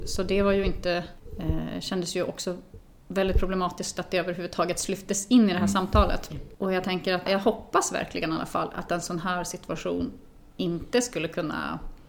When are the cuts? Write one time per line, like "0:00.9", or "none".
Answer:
0:06.3